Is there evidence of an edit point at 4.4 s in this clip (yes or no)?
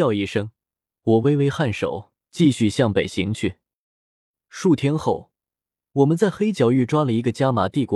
no